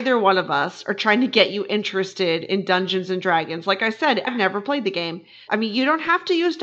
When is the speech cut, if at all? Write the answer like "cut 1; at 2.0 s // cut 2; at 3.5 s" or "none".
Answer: cut 1; at 4.3 s // cut 2; at 5.5 s